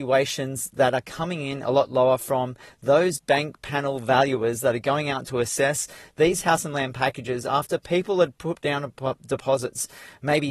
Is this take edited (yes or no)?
no